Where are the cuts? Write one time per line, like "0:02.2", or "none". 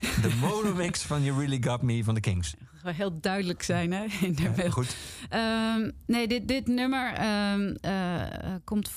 none